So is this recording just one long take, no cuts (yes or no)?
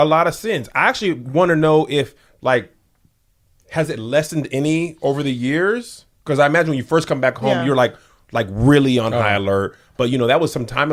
yes